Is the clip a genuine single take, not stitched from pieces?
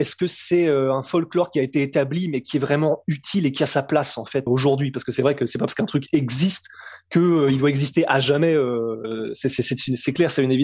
no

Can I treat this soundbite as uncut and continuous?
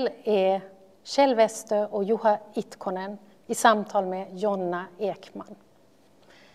yes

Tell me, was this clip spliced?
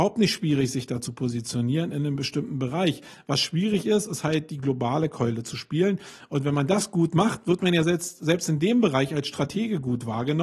no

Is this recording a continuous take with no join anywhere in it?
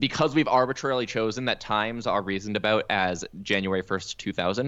yes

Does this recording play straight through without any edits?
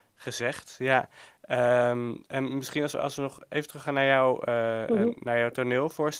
yes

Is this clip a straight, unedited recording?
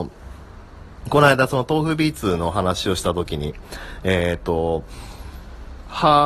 yes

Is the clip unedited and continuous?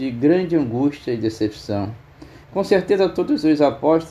no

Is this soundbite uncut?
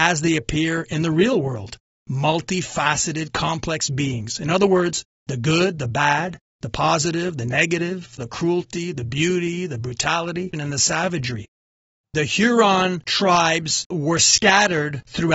no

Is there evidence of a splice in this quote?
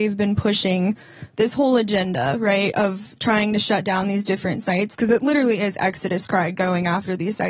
no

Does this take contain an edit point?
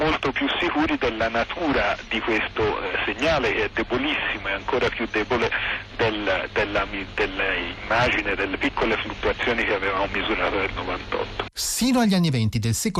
yes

